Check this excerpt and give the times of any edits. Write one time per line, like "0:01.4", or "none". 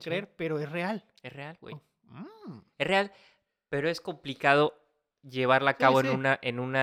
none